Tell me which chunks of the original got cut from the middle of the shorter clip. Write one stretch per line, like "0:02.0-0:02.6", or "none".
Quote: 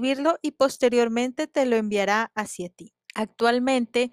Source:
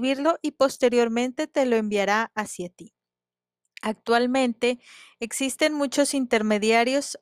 0:03.0-0:03.7

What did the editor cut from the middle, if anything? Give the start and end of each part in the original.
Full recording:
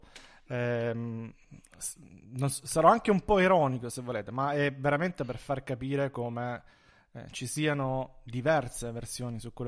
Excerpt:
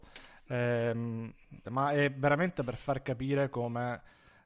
0:01.6-0:04.3

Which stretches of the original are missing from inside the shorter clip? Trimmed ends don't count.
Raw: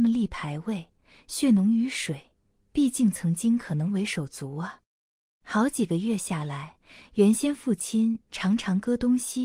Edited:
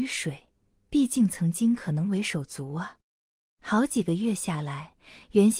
none

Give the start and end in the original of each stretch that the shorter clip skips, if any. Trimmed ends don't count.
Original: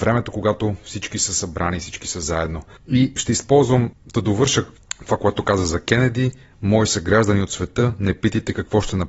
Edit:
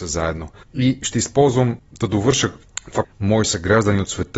0:05.2-0:06.5

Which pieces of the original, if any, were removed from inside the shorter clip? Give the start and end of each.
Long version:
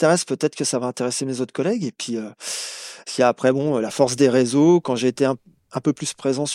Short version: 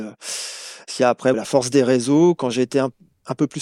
0:03.5-0:03.8

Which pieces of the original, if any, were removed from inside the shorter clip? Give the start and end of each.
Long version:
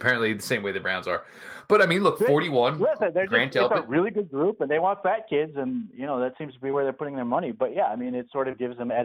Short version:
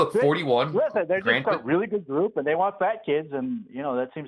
0:03.5-0:03.7

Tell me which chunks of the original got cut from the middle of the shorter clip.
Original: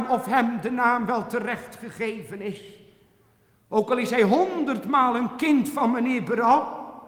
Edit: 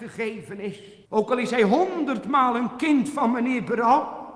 0:02.9-0:03.6

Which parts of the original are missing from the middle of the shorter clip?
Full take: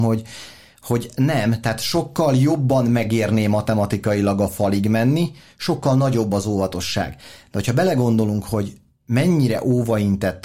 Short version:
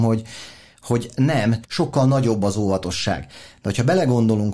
0:01.6-0:05.5

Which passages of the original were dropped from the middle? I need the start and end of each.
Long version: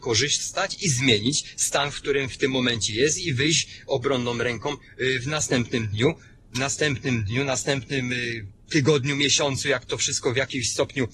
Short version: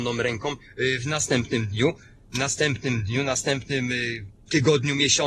none

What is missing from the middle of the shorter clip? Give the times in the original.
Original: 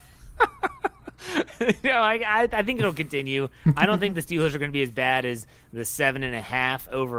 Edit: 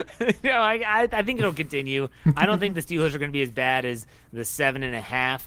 none

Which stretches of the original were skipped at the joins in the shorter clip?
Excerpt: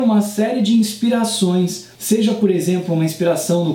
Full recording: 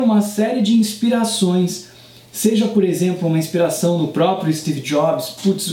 0:01.9-0:02.3

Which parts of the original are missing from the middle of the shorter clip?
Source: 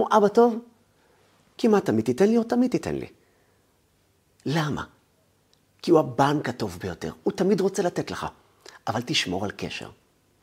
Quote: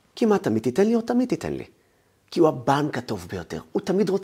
0:03.6-0:05.7

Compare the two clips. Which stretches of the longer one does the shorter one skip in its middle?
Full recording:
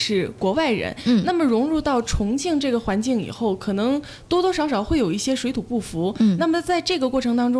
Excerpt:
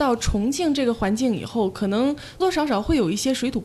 0:04.3-0:04.4

